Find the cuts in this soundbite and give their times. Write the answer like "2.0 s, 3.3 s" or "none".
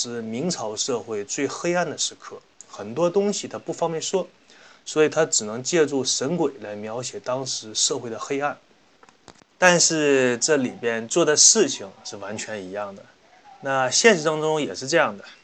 9.5 s